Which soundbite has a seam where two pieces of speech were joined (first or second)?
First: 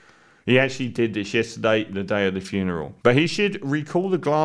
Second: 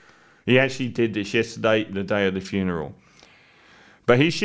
first